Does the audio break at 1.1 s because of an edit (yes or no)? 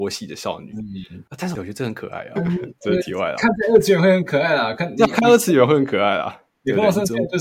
no